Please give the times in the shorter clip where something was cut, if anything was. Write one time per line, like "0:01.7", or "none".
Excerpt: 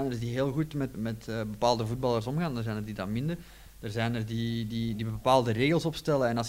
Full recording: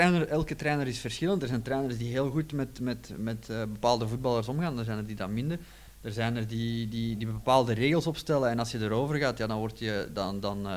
0:00.9